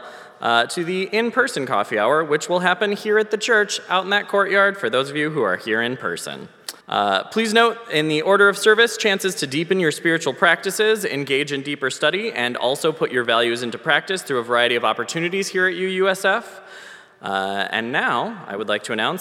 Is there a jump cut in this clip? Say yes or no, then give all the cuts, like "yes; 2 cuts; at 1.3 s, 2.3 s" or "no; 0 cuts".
yes; 1 cut; at 6.8 s